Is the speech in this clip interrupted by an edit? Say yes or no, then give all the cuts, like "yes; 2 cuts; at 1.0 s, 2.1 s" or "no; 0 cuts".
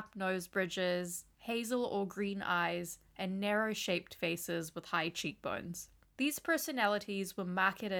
no; 0 cuts